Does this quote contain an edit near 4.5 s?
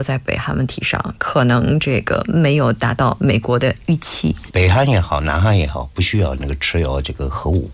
yes; 1 cut; at 4.5 s

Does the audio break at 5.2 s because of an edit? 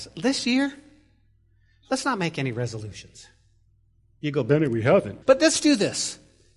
yes; 1 cut; at 5.2 s

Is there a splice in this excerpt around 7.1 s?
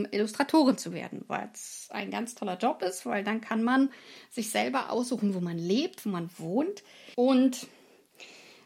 yes; 1 cut; at 7.1 s

